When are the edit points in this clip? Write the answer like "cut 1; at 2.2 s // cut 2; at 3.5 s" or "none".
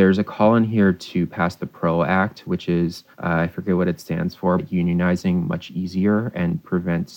cut 1; at 3.1 s // cut 2; at 4.6 s